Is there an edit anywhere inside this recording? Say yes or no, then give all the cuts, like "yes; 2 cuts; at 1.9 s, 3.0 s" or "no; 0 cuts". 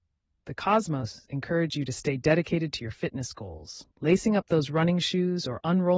yes; 1 cut; at 3.9 s